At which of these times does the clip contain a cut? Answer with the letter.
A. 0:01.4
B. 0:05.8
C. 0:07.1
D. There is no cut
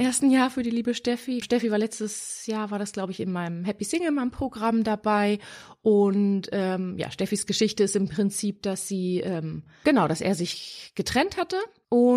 A